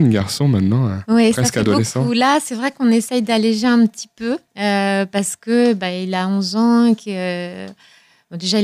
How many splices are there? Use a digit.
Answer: 1